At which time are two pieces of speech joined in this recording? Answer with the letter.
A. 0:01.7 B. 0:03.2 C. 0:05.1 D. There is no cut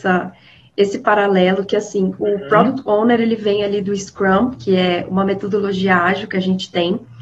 D